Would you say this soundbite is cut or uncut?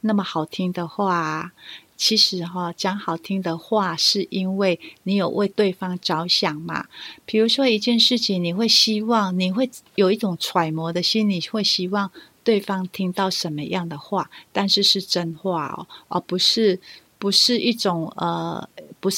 cut